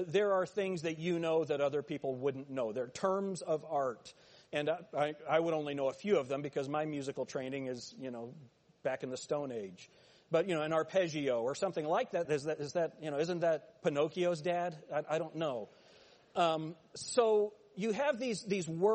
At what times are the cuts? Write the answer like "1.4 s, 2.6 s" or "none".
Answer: 12.3 s